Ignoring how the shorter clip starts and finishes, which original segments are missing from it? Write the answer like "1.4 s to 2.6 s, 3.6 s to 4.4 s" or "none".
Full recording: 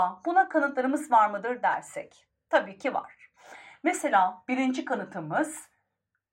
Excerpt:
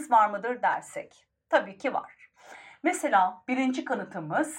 none